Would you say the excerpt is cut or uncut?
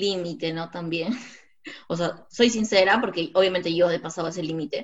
uncut